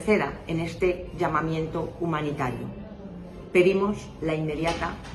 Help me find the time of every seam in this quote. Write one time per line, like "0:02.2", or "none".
none